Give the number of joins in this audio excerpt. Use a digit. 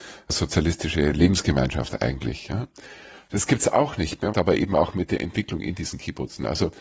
1